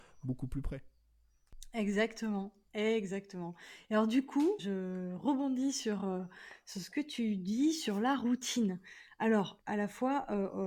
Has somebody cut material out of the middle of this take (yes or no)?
yes